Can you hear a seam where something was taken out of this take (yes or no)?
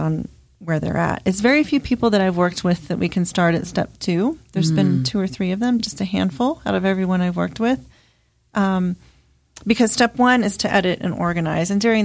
no